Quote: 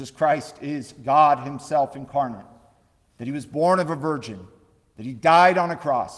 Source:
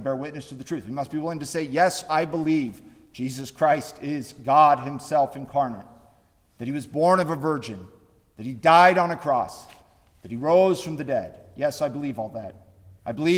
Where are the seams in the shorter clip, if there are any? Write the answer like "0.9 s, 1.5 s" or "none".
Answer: none